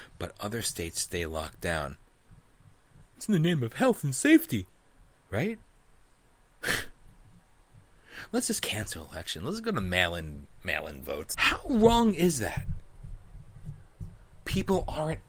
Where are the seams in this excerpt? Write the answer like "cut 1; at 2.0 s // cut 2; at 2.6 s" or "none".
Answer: cut 1; at 11.3 s // cut 2; at 14.3 s